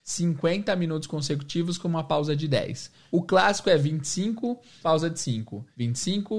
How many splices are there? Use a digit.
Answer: 0